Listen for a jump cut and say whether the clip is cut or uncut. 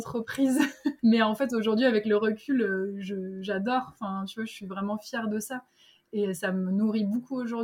uncut